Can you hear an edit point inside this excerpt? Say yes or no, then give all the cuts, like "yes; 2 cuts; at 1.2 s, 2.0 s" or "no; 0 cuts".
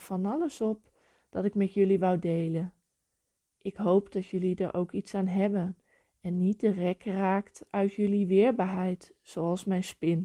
no; 0 cuts